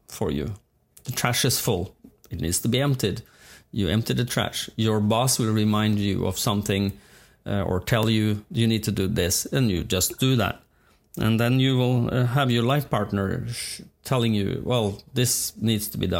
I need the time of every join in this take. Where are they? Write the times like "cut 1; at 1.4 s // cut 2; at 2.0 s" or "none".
none